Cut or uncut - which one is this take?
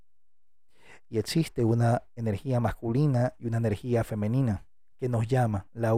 uncut